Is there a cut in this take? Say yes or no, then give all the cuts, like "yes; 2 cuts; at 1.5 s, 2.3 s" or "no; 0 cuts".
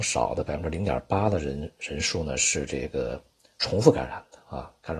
no; 0 cuts